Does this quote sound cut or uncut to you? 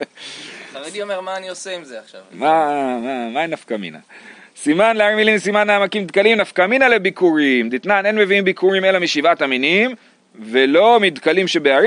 uncut